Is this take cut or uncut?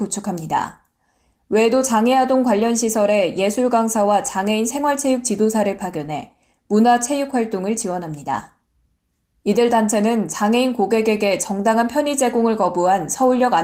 cut